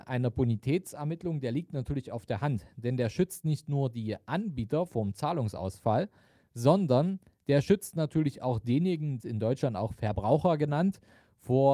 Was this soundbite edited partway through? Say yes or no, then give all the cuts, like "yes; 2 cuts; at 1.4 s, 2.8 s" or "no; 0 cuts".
yes; 1 cut; at 9.2 s